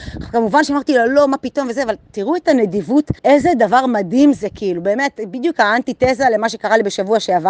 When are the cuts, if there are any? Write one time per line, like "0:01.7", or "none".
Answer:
0:03.2